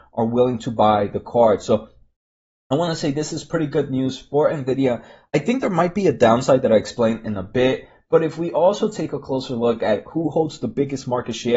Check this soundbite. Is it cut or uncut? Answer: uncut